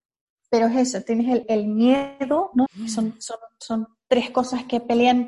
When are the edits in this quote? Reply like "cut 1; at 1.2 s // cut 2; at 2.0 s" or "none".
cut 1; at 1.4 s // cut 2; at 2.7 s